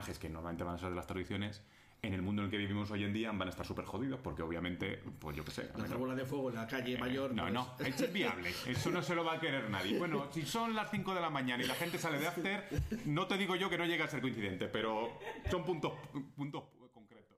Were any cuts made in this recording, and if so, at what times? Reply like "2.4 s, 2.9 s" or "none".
none